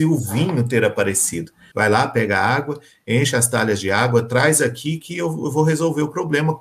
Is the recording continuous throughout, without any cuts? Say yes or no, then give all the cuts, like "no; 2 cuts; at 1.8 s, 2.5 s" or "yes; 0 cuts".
no; 1 cut; at 1.7 s